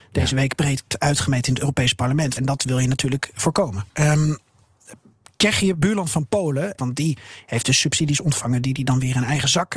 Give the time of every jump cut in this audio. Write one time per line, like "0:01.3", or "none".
0:02.4
0:03.9
0:06.8